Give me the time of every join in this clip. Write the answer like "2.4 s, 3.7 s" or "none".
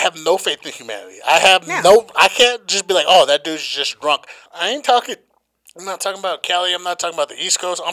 4.5 s